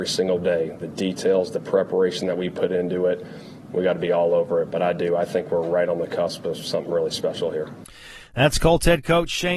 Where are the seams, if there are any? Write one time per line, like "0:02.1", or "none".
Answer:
0:03.7